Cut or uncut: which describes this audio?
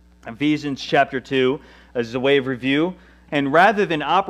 cut